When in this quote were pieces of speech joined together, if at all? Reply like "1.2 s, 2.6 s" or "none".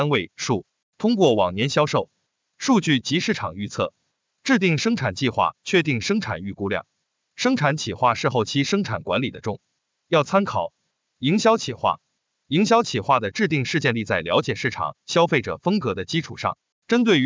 none